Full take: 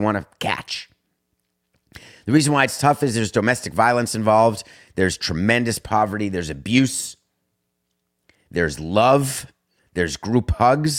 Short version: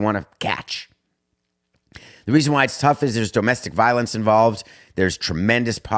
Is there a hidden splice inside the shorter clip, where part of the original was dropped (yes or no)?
no